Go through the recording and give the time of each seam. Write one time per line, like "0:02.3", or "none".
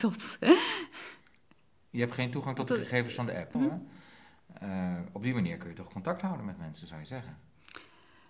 0:03.5